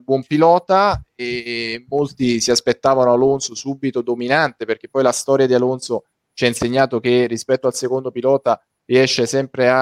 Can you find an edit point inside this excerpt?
no; 0 cuts

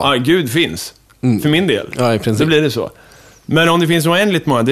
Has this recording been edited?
no; 0 cuts

